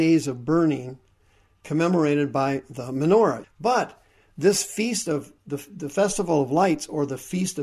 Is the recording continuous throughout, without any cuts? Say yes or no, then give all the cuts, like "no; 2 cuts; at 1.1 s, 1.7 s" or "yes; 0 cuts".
no; 1 cut; at 3.4 s